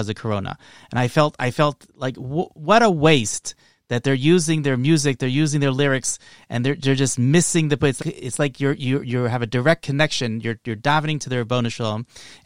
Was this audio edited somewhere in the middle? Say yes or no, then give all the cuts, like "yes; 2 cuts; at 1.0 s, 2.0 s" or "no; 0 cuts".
yes; 1 cut; at 8.0 s